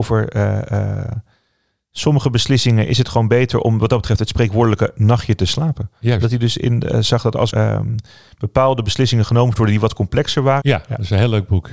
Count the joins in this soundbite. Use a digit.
2